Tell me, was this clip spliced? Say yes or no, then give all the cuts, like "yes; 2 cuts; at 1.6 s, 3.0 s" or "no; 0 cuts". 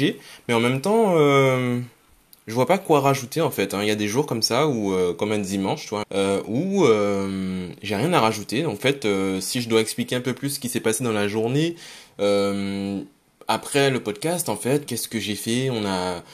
yes; 2 cuts; at 6.0 s, 14.9 s